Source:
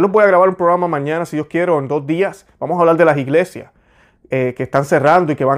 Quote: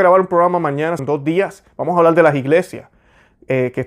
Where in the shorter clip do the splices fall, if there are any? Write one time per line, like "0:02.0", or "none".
0:01.0